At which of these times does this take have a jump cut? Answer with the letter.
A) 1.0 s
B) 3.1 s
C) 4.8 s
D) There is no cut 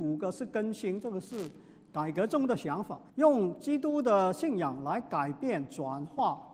B